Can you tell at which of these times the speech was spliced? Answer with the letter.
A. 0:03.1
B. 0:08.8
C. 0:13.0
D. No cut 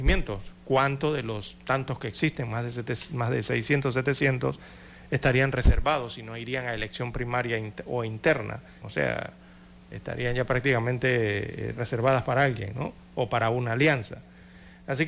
B